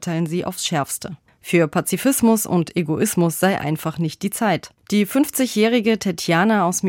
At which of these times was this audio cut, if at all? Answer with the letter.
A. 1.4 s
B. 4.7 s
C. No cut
B